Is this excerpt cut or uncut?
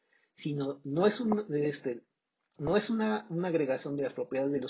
uncut